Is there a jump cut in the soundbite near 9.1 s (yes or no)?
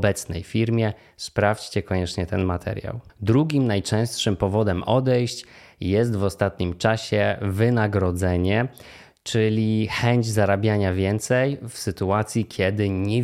no